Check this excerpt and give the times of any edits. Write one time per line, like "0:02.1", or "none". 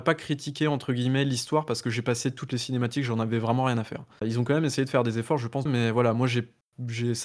0:04.2
0:05.7

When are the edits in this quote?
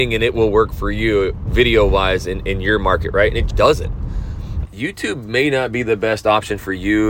0:03.5
0:04.6

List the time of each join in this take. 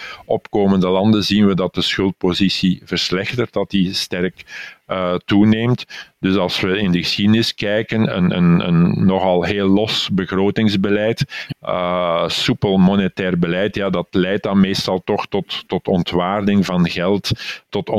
0:11.5

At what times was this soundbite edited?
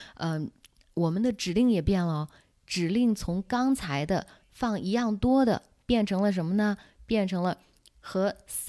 none

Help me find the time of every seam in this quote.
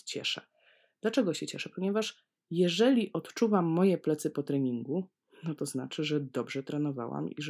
none

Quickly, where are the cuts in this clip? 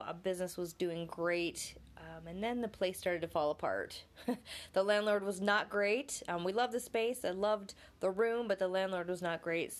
none

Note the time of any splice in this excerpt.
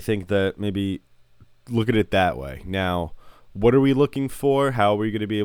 none

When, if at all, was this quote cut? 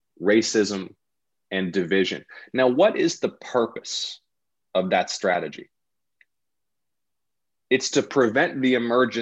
none

